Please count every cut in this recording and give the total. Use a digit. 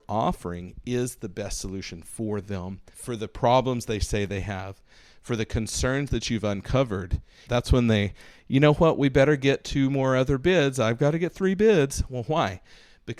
2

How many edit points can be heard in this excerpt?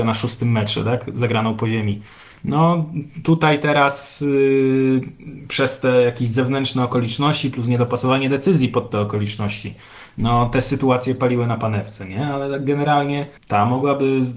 1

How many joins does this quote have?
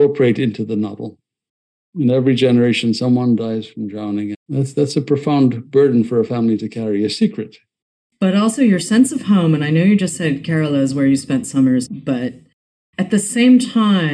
2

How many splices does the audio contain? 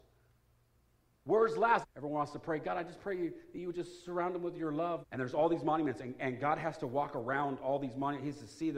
2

